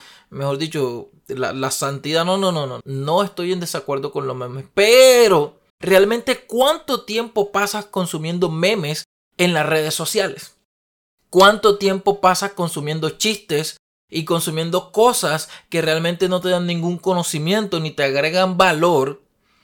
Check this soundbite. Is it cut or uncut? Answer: cut